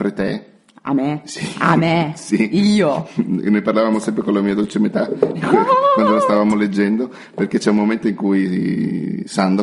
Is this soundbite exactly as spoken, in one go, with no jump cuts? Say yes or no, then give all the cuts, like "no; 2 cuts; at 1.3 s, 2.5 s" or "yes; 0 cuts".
yes; 0 cuts